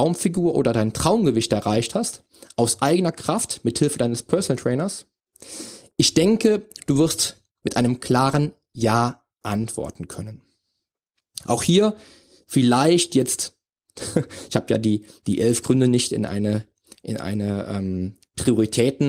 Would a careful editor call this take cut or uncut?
uncut